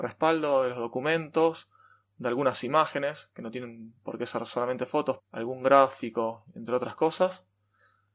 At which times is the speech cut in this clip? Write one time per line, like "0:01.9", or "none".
0:05.2